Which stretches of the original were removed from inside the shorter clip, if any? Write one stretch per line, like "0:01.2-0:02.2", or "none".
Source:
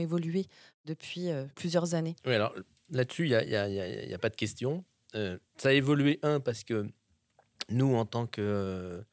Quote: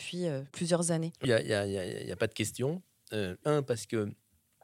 0:02.3-0:03.3
0:05.4-0:06.2